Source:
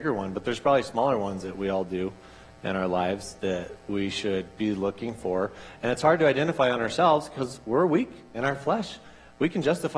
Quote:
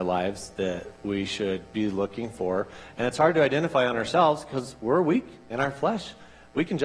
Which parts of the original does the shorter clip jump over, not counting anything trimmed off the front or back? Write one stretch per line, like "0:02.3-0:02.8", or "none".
none